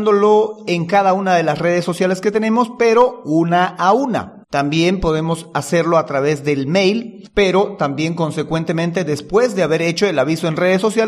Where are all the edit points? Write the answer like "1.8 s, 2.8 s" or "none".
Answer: 4.4 s